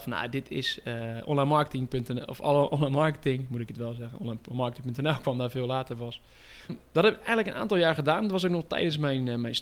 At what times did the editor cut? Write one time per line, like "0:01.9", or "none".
0:06.7